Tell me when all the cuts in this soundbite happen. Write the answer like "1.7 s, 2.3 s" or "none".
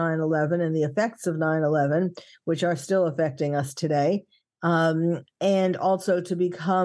none